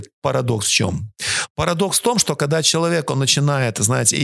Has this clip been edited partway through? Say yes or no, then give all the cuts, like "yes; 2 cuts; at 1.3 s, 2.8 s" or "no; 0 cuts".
no; 0 cuts